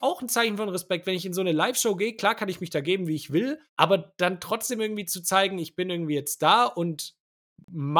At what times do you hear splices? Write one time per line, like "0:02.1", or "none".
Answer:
0:03.7

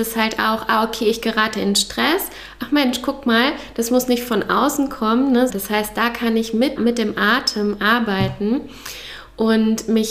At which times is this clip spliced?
0:05.5
0:06.8

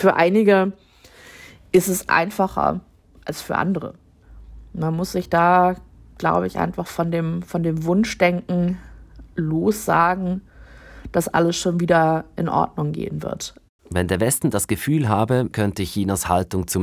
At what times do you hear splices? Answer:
0:13.8
0:15.5

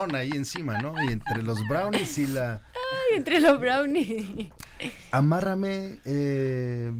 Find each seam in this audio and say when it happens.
none

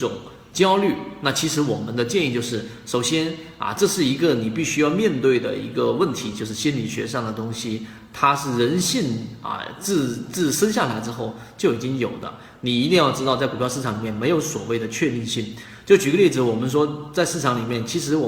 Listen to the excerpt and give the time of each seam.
none

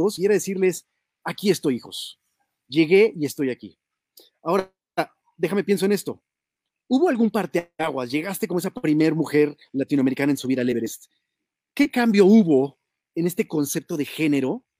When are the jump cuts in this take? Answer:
none

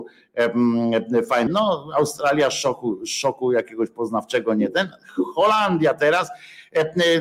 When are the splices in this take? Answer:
0:01.5

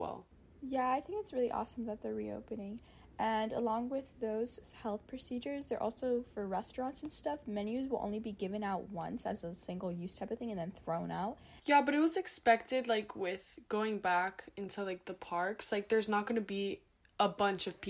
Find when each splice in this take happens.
0:11.6

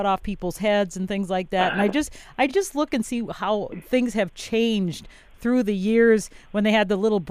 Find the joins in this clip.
none

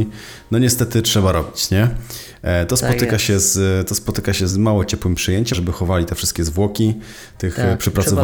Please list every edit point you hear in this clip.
0:04.5
0:05.5

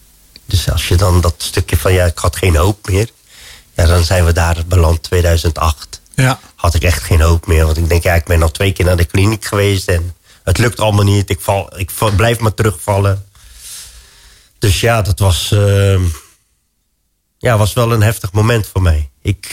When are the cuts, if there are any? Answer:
none

